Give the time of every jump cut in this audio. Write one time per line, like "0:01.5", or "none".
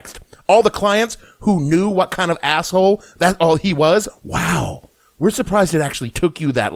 0:04.1